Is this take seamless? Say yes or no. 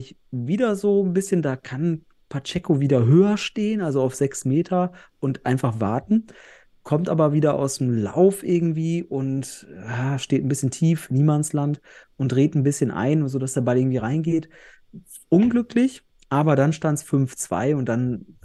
yes